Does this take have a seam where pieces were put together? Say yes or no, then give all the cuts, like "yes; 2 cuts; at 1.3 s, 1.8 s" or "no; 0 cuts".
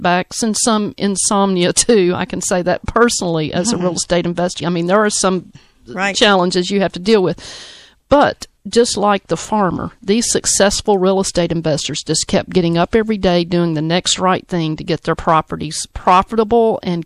yes; 1 cut; at 4.6 s